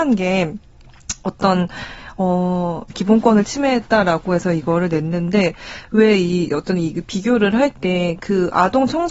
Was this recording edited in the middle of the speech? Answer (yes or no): yes